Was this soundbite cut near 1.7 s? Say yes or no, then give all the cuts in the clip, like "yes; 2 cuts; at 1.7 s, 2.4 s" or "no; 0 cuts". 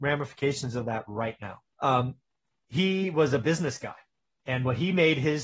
yes; 1 cut; at 1.7 s